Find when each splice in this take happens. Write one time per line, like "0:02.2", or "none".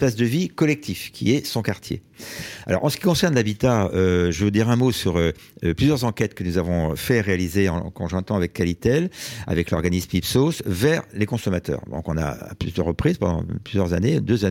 none